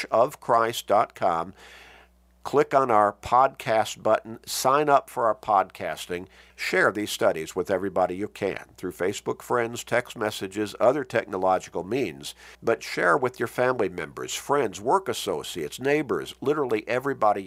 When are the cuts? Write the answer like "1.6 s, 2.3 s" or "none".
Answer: 6.5 s, 12.5 s